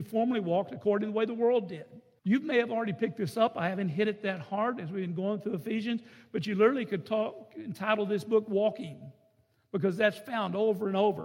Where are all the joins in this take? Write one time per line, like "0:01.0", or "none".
0:02.2